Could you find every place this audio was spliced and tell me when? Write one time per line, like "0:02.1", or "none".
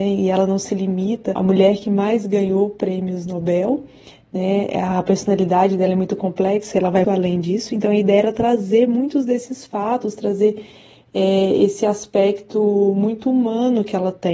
0:07.0